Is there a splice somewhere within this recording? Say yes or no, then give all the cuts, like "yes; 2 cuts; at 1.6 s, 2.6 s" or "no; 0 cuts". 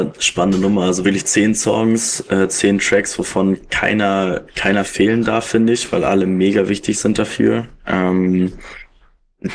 no; 0 cuts